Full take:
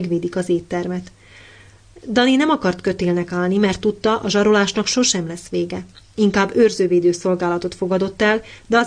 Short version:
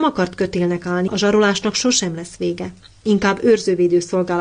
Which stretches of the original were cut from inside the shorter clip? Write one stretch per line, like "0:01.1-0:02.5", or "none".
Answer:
0:03.5-0:04.2